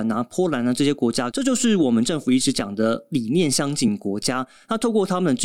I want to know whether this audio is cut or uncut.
cut